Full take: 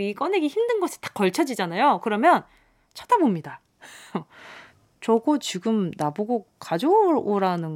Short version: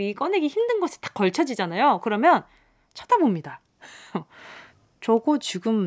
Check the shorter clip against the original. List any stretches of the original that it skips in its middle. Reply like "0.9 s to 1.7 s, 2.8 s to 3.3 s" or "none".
none